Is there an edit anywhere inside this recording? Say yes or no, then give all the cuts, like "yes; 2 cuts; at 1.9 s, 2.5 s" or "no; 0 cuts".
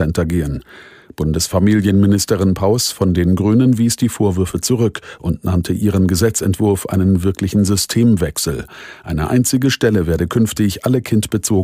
no; 0 cuts